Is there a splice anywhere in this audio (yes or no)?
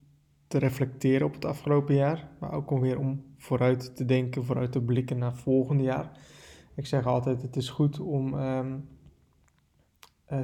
no